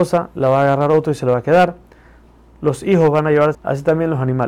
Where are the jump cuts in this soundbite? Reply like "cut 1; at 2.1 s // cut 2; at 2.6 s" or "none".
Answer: cut 1; at 3.5 s